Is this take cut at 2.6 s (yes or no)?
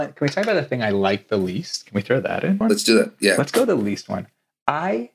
yes